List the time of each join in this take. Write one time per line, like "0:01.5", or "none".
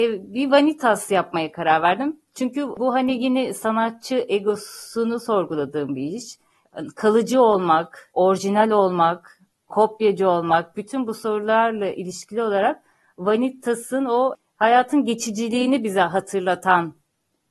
none

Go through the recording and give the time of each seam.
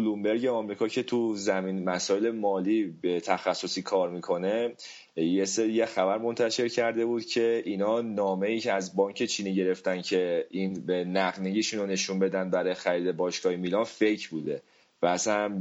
none

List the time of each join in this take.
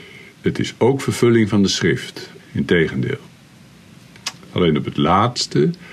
0:02.4

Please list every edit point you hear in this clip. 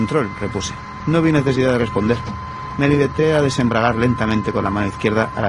0:01.0

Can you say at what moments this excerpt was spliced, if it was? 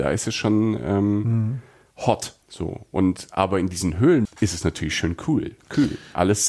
0:02.4
0:04.3

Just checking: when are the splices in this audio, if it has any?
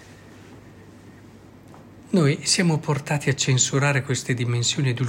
none

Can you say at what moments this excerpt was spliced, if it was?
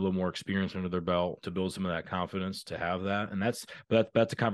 0:01.4

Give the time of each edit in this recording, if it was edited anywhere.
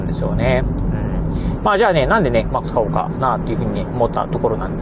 0:01.6
0:02.6

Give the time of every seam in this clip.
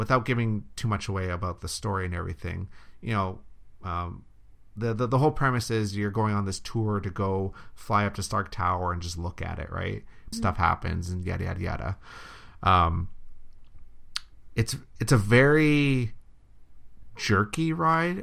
0:10.3

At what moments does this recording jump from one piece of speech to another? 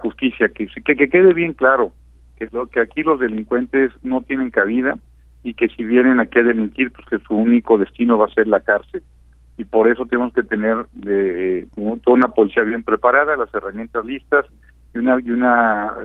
none

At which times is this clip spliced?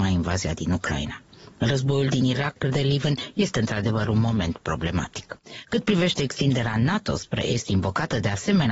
0:02.6

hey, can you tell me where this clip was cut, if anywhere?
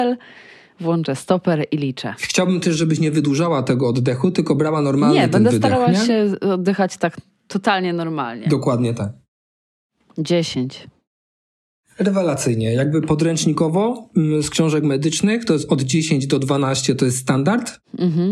none

